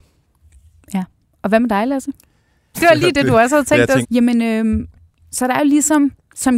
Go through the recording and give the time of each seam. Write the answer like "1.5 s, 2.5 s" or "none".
2.7 s, 4.0 s